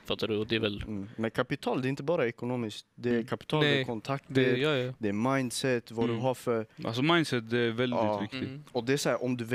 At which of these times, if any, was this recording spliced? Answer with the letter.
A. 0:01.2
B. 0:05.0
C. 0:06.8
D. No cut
D